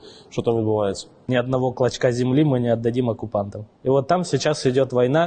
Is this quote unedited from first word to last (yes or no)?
no